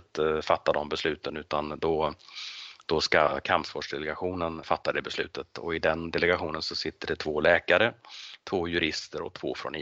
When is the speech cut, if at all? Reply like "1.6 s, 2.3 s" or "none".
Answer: 4.6 s